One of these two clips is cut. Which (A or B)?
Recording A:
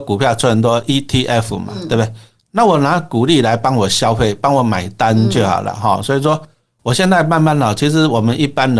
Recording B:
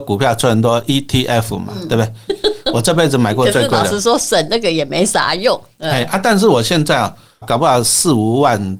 B